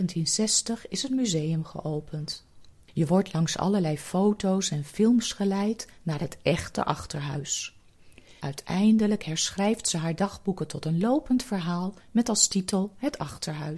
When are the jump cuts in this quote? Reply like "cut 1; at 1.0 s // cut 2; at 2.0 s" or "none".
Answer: cut 1; at 8.4 s